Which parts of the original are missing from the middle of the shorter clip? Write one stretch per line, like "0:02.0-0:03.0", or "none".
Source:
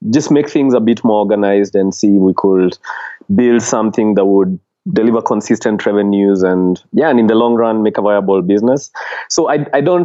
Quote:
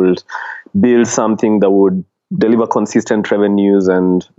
none